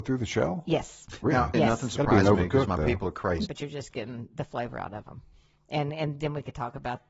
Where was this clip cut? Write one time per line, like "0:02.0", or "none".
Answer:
0:01.5
0:03.4